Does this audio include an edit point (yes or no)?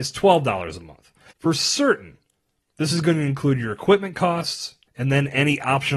yes